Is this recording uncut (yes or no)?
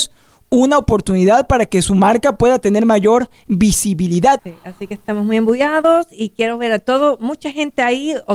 no